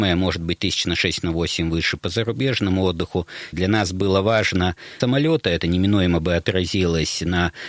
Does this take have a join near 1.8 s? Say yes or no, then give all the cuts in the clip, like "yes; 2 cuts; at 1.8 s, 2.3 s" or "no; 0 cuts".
no; 2 cuts; at 3.5 s, 5.0 s